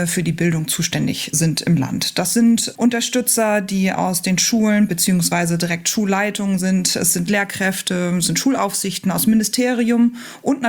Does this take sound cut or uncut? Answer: uncut